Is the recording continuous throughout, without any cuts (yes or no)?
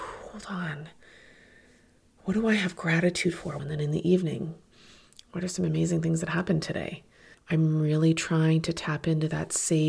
no